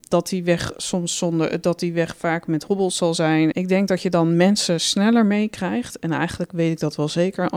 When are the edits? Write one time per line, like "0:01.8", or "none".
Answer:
0:03.5